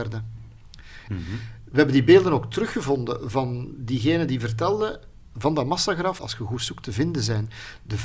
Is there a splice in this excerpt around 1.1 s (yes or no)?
yes